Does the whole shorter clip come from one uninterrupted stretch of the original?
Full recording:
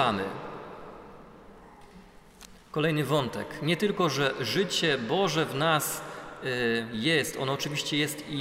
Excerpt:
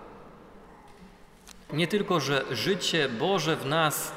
no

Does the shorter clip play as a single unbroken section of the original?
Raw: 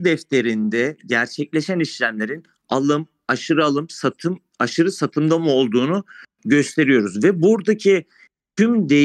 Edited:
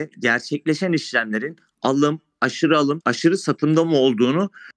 no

